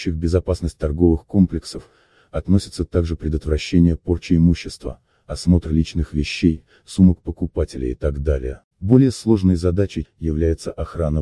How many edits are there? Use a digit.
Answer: 2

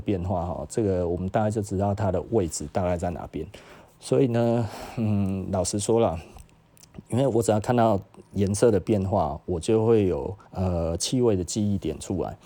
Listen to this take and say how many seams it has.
1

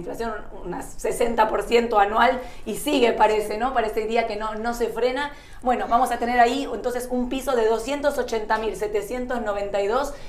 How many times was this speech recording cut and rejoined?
0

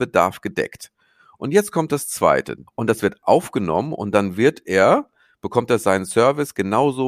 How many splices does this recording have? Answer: 1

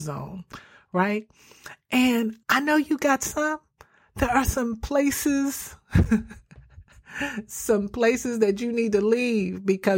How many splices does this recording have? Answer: 1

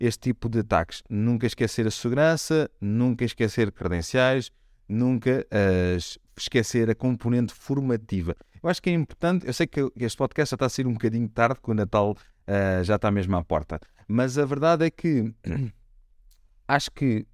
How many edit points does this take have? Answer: 0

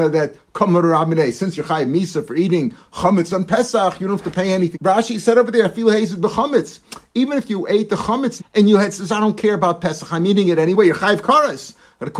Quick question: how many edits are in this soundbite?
2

